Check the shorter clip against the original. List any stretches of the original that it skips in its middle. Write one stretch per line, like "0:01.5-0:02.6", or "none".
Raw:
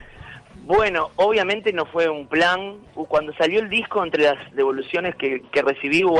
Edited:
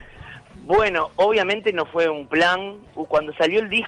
none

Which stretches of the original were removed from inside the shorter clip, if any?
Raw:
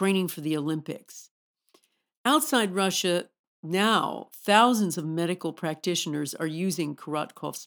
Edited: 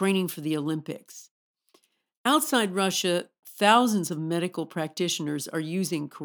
0:03.4-0:04.3

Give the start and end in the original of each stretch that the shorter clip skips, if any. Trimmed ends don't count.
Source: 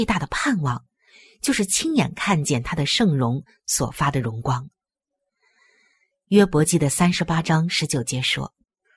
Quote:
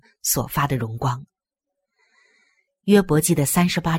none

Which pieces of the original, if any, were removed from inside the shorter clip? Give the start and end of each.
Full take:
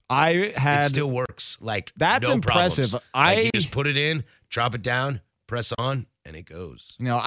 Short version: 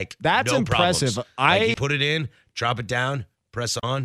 0:03.5-0:03.7

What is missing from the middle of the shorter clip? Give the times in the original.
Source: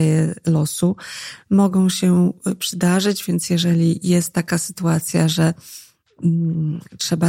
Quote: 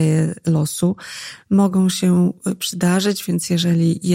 none

